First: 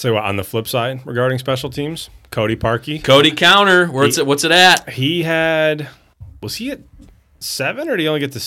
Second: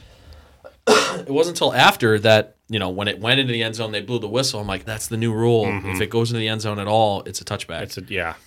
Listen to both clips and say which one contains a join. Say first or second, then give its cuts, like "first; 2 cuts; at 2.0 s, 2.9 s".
second; 1 cut; at 4.9 s